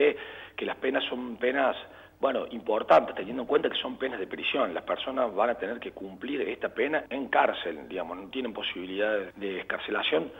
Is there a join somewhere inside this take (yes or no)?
yes